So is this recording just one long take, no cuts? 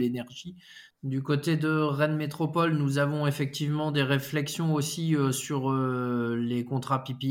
no; 1 cut; at 0.9 s

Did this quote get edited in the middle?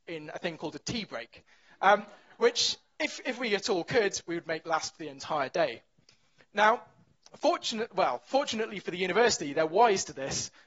no; 0 cuts

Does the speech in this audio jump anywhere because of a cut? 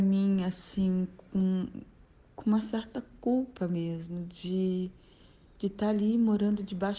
no; 0 cuts

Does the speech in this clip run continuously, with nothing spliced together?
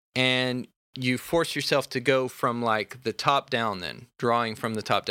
yes; 0 cuts

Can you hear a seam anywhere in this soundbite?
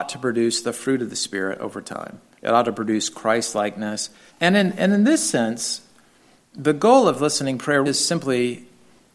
yes; 2 cuts; at 4.3 s, 7.9 s

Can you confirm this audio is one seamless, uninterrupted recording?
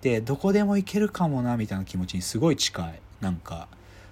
yes; 0 cuts

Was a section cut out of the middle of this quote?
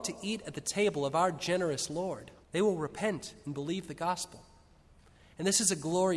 yes; 1 cut; at 2.4 s

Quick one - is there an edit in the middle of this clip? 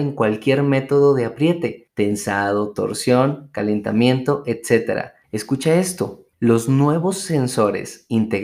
yes; 2 cuts; at 5.2 s, 6.3 s

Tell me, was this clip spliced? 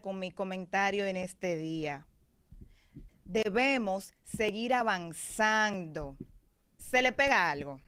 yes; 2 cuts; at 3.1 s, 6.8 s

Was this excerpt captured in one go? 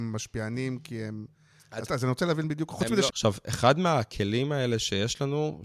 no; 2 cuts; at 1.9 s, 3.1 s

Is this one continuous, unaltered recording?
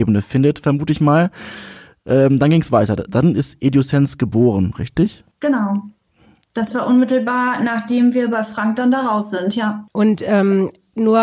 no; 1 cut; at 5.3 s

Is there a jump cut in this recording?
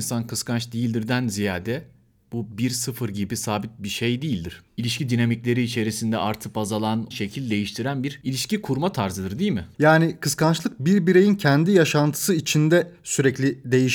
yes; 2 cuts; at 7.1 s, 9.7 s

